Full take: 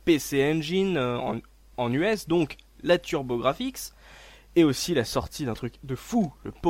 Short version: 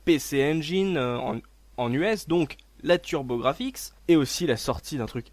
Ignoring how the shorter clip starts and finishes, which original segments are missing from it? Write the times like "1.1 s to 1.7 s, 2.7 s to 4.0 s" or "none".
4.0 s to 4.4 s